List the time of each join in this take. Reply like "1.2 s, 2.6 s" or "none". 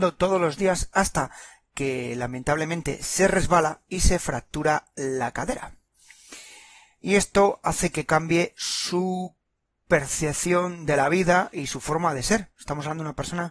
none